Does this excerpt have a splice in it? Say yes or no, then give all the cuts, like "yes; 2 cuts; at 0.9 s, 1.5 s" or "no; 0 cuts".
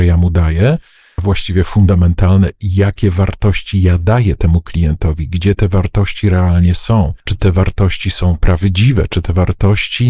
yes; 2 cuts; at 1.2 s, 7.2 s